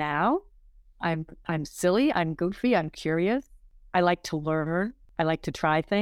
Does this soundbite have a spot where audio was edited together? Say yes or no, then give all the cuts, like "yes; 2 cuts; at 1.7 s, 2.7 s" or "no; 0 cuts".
no; 0 cuts